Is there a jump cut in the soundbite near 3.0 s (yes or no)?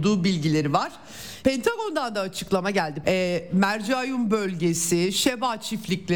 yes